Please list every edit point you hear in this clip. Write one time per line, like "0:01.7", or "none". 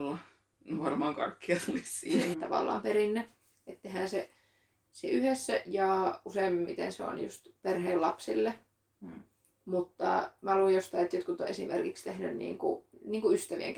0:02.3